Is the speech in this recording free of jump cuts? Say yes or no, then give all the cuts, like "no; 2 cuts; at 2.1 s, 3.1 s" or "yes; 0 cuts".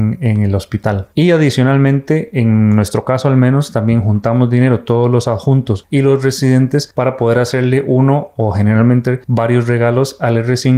no; 1 cut; at 1.1 s